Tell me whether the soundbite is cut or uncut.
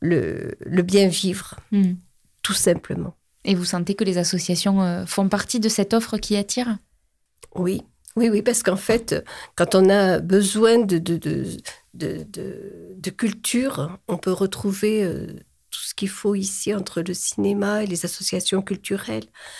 uncut